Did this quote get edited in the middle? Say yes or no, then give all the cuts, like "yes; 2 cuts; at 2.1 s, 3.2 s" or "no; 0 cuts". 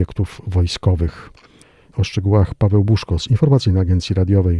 yes; 1 cut; at 1.9 s